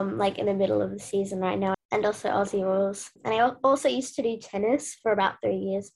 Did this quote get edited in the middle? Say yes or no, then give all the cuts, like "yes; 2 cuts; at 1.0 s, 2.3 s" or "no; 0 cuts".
yes; 1 cut; at 1.7 s